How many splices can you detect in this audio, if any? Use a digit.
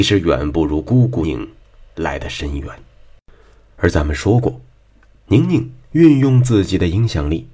1